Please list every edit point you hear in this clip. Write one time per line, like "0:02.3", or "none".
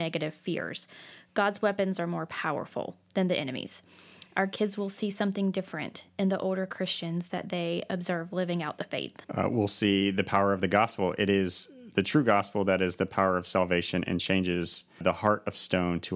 0:04.3
0:09.2
0:15.0